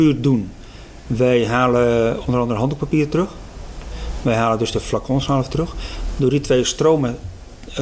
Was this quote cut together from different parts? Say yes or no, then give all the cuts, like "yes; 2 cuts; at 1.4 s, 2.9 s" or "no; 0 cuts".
no; 0 cuts